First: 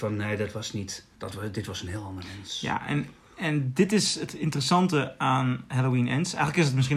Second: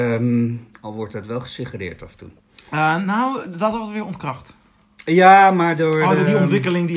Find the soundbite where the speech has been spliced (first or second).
first